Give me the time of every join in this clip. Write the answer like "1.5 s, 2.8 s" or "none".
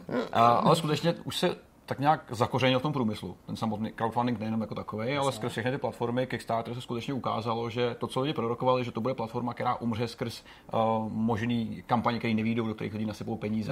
none